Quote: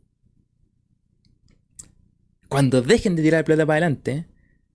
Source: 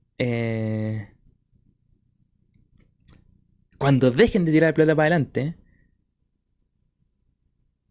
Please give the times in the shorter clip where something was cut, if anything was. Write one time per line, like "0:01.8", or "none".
none

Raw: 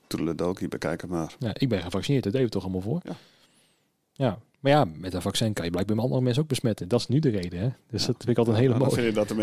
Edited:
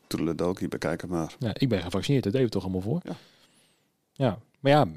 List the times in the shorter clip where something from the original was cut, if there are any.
none

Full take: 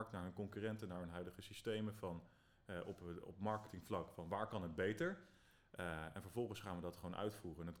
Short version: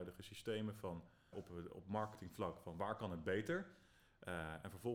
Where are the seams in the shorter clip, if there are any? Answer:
0:01.3

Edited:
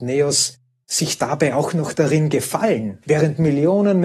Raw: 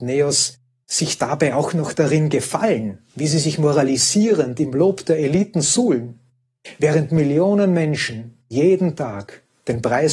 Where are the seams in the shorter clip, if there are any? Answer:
0:03.0

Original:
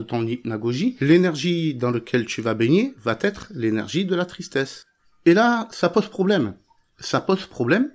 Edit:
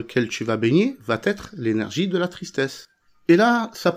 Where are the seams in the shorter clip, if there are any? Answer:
none

